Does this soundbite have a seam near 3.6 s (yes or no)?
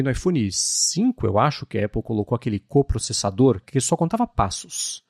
yes